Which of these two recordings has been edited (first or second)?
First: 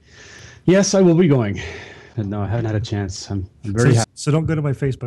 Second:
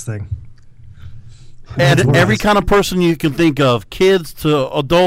first